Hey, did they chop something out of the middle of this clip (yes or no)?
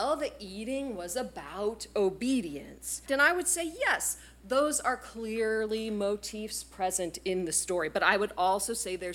yes